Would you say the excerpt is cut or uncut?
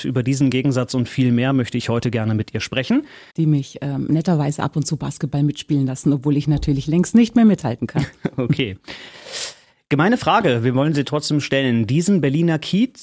cut